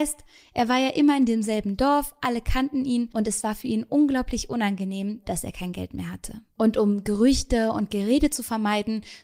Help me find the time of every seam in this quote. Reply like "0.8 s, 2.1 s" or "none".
5.2 s